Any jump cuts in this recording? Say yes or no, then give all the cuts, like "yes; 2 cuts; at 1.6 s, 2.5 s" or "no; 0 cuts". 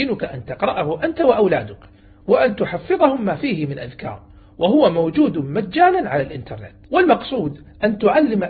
yes; 1 cut; at 6.8 s